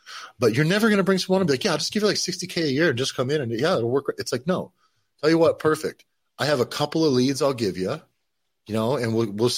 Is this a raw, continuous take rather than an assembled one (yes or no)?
yes